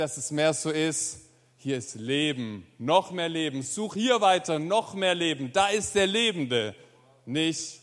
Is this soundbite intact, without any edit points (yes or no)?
yes